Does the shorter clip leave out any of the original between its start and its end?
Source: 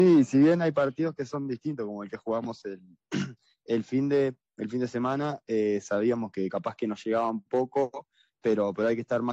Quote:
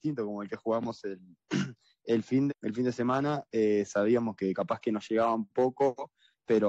yes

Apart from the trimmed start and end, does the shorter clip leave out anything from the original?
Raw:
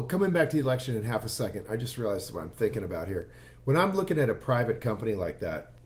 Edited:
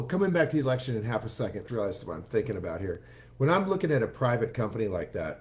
yes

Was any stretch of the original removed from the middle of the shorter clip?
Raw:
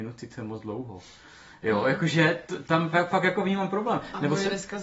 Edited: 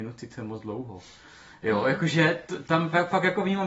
no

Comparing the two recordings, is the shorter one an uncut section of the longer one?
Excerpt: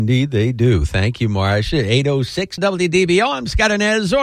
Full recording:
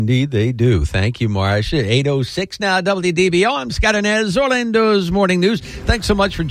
no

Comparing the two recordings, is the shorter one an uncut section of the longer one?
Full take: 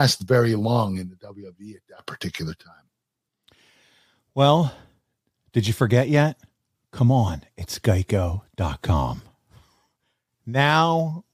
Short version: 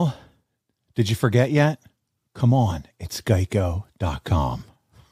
yes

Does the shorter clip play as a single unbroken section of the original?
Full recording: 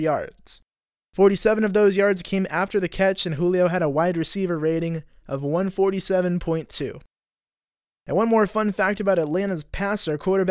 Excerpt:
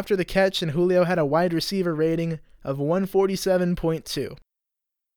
yes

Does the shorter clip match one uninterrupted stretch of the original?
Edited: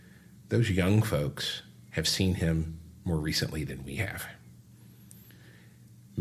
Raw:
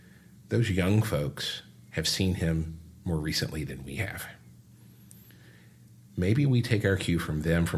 yes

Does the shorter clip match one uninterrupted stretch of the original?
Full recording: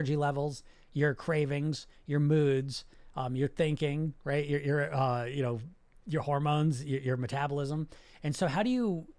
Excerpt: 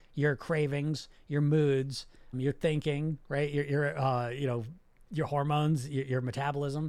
no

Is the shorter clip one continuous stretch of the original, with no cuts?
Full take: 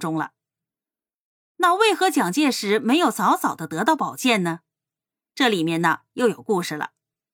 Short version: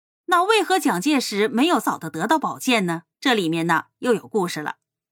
no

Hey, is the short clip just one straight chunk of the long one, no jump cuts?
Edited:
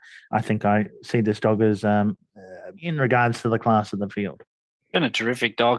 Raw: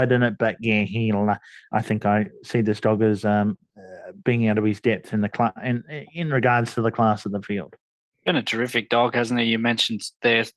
no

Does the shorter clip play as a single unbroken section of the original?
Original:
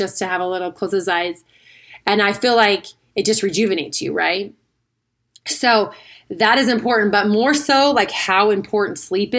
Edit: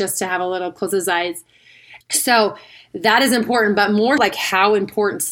no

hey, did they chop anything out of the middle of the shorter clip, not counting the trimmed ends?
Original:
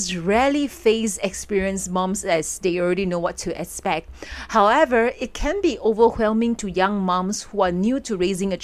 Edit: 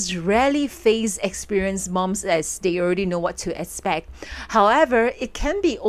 no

